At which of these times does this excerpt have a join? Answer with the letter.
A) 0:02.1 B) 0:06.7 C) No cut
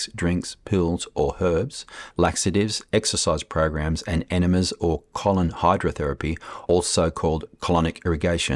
A